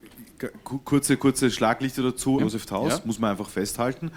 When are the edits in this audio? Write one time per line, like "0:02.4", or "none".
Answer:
0:01.2
0:02.4